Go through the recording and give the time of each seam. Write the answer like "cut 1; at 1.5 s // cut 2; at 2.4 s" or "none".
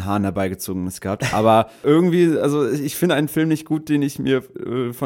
none